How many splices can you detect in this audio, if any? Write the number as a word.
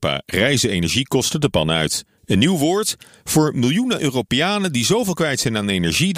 one